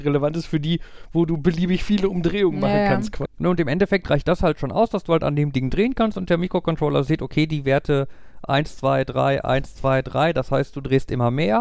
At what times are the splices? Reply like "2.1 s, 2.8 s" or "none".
3.2 s